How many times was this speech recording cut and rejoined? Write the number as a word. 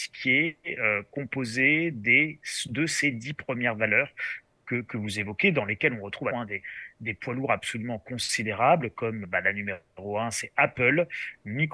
two